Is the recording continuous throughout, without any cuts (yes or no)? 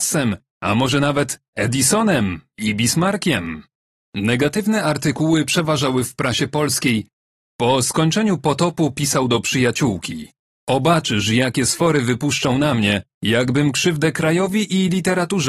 no